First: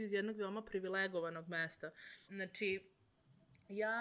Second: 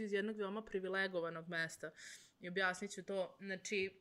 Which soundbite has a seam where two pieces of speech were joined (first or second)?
first